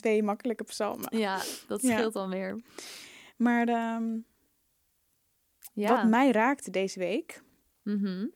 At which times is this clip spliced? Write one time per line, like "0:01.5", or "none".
none